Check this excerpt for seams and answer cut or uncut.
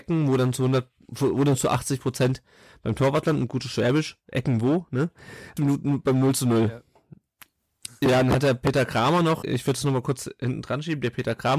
cut